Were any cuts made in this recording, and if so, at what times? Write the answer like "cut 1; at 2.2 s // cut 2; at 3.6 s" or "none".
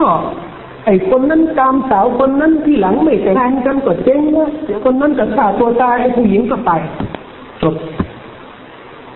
cut 1; at 3.3 s